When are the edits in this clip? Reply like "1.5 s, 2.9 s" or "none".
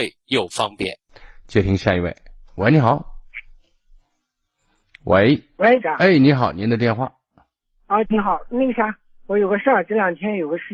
5.8 s, 8.0 s